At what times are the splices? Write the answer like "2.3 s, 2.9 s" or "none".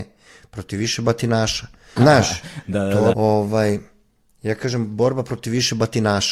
2.0 s, 3.1 s